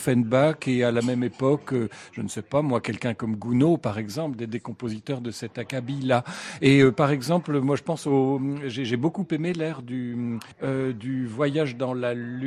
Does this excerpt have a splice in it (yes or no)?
yes